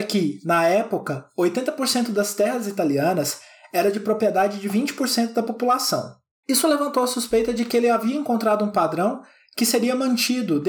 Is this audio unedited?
no; 1 cut; at 6.4 s

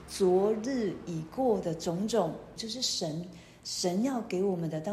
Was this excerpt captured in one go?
no; 1 cut; at 2.6 s

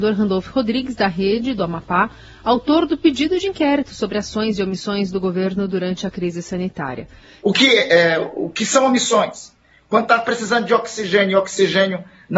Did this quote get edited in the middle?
yes; 1 cut; at 7.4 s

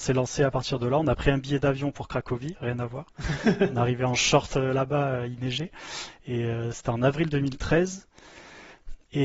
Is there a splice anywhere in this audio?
no; 0 cuts

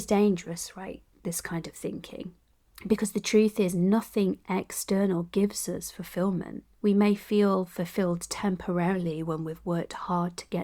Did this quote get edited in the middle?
yes; 2 cuts; at 2.7 s, 6.7 s

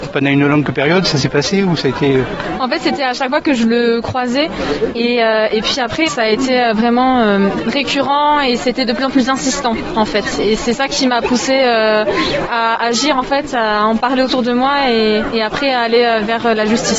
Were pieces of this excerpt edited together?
yes; 1 cut; at 6.1 s

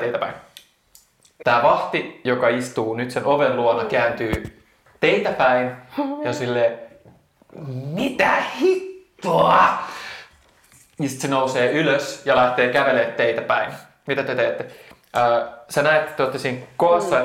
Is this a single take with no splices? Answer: no; 1 cut; at 1.4 s

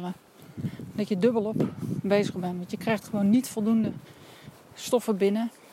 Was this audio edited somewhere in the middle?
no; 0 cuts

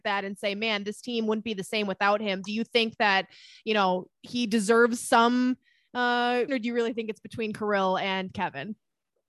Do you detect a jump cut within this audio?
yes; 1 cut; at 6.5 s

